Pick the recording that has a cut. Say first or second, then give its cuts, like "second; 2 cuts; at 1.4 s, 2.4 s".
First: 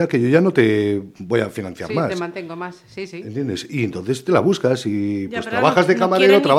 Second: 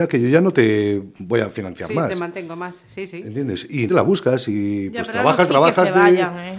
second; 2 cuts; at 3.9 s, 5.5 s